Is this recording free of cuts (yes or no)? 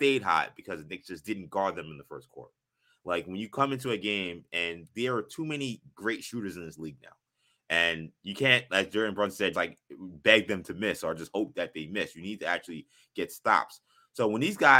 no